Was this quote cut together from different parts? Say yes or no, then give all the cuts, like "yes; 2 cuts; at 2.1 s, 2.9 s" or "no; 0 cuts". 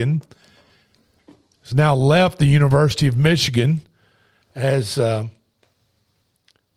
no; 0 cuts